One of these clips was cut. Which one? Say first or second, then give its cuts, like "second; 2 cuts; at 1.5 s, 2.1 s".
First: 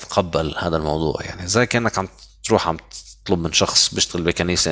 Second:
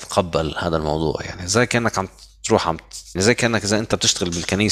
second; 1 cut; at 3.2 s